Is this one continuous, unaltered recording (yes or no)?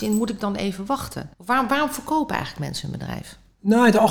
no